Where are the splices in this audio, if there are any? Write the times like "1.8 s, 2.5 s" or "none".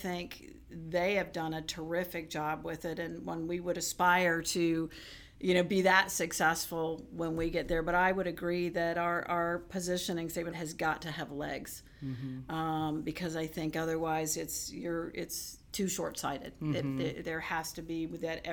10.5 s